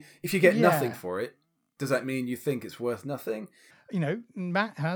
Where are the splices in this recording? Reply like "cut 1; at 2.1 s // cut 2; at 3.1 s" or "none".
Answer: cut 1; at 3.7 s